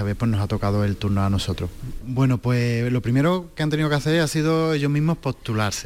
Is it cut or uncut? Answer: cut